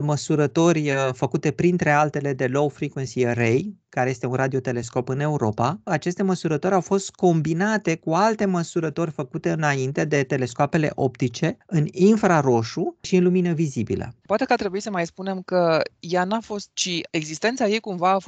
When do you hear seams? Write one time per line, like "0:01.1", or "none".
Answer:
0:05.9
0:14.2
0:16.7